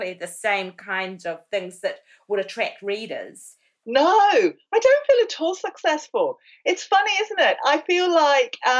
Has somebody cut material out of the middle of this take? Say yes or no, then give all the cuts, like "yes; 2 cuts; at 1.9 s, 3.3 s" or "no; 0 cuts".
yes; 1 cut; at 3.8 s